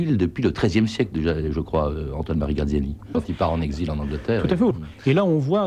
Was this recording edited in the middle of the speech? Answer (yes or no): yes